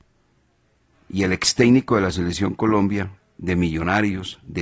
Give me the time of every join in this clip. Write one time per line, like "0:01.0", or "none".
0:00.9